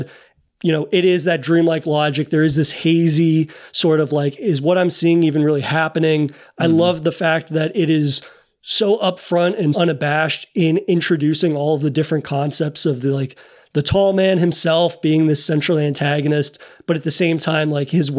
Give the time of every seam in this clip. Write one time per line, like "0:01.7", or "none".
0:09.7